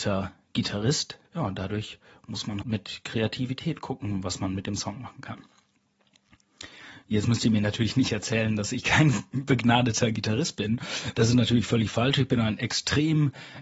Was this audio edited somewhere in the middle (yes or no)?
yes